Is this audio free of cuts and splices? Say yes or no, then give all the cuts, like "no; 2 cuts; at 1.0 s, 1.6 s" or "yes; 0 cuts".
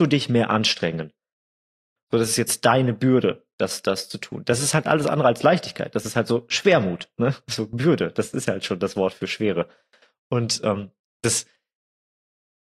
no; 1 cut; at 2.0 s